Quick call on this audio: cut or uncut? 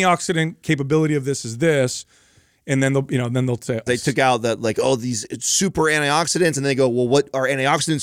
cut